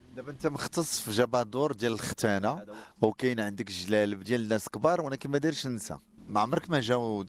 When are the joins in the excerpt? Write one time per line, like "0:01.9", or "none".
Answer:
0:04.2

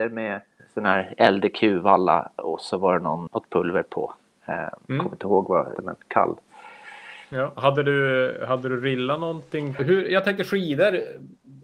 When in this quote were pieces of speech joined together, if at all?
0:03.3
0:05.8
0:09.8

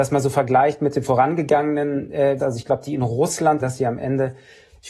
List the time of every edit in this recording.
0:02.4
0:03.6

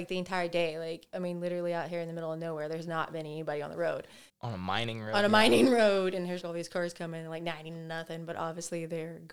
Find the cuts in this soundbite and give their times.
0:04.3
0:06.4

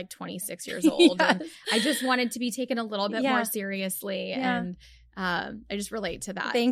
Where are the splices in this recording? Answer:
none

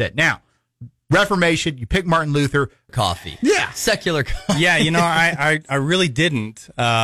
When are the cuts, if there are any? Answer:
0:02.9

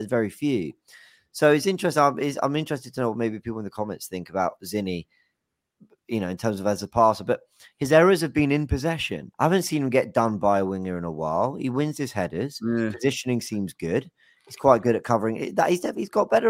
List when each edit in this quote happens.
0:09.3

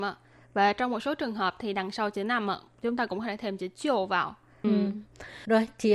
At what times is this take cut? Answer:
0:04.6

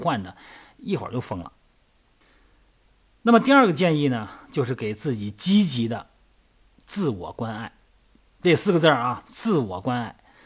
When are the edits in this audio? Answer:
none

